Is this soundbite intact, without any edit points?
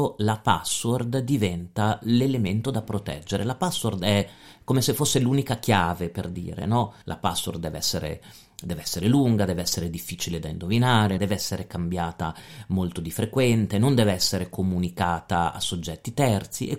no; 2 cuts; at 7.0 s, 11.2 s

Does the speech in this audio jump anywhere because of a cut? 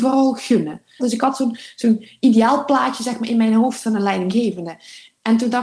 yes; 1 cut; at 1.0 s

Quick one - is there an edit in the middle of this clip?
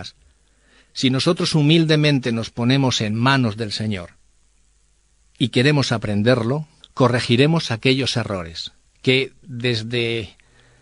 yes; 2 cuts; at 6.8 s, 8.9 s

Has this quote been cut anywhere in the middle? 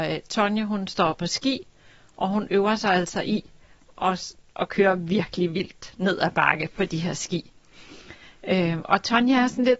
no; 0 cuts

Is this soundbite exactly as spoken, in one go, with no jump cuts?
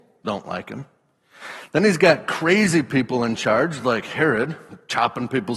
yes; 0 cuts

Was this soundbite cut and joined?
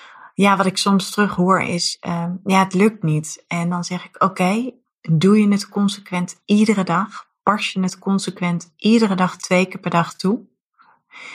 no; 0 cuts

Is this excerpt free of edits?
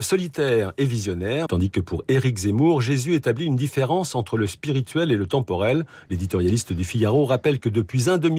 no; 2 cuts; at 1.5 s, 6.1 s

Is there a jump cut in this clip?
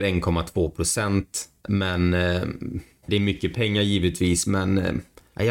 yes; 1 cut; at 3.0 s

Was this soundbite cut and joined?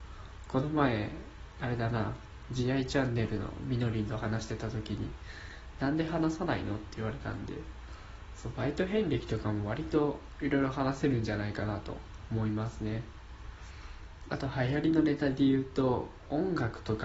no; 0 cuts

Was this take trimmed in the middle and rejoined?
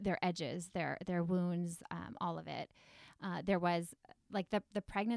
no; 0 cuts

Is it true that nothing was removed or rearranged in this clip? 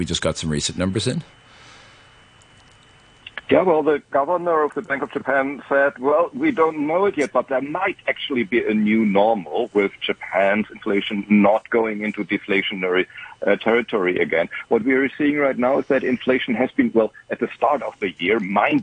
no; 1 cut; at 3.4 s

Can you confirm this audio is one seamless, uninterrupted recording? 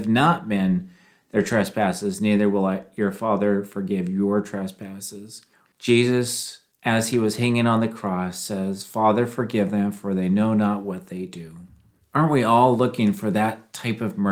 no; 1 cut; at 5.7 s

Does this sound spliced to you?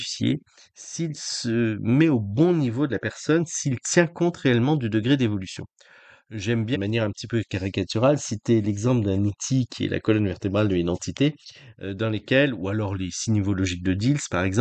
yes; 1 cut; at 6.7 s

